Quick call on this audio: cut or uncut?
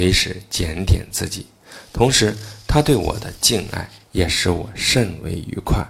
uncut